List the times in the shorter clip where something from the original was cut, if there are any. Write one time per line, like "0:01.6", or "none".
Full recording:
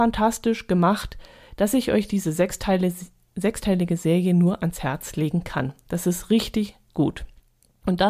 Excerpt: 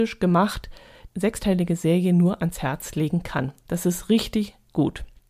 0:01.1